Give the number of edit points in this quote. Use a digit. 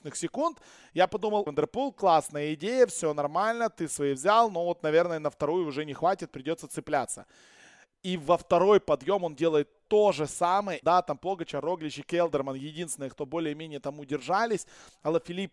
2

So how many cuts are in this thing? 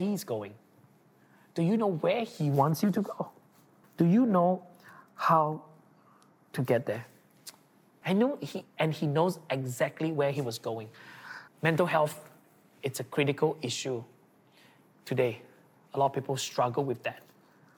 3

